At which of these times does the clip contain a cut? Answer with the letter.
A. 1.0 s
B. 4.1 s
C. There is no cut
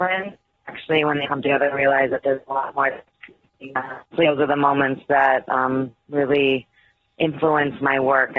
B